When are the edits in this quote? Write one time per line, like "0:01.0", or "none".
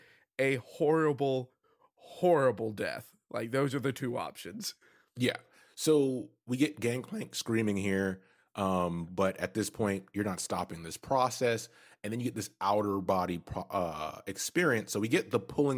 none